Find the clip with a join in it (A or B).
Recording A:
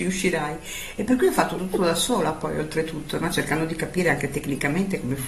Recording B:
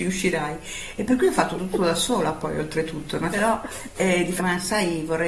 B